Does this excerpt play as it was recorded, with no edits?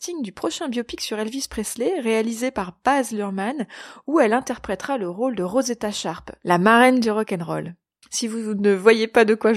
no; 1 cut; at 8.0 s

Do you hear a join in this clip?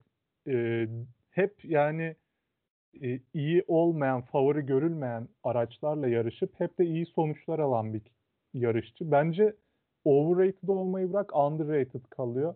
no; 0 cuts

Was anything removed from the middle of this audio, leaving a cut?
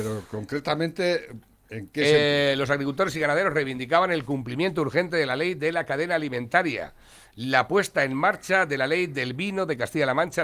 no; 0 cuts

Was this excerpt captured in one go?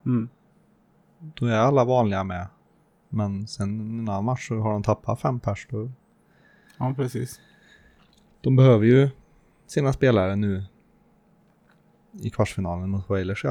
yes; 0 cuts

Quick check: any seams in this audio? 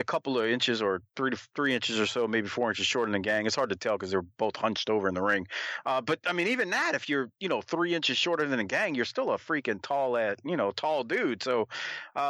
no; 0 cuts

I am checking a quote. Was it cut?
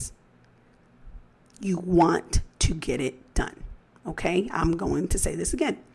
no; 0 cuts

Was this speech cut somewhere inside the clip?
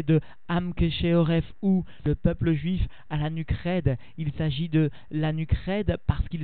no; 0 cuts

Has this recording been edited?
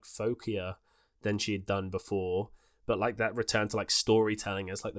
no; 0 cuts

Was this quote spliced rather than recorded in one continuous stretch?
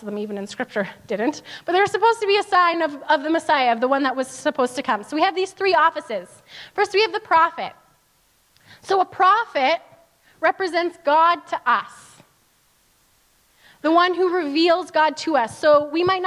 no; 0 cuts

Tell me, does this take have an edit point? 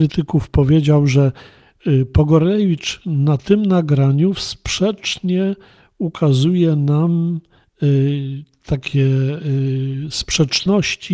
no; 0 cuts

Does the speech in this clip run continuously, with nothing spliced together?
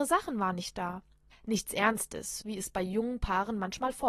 no; 2 cuts; at 1.3 s, 2.4 s

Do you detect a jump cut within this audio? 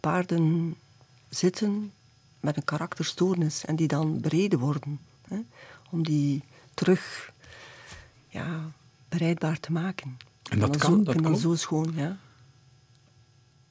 no; 0 cuts

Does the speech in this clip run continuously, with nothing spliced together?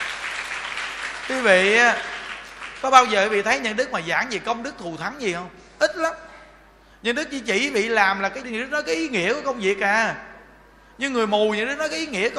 no; 1 cut; at 8.4 s

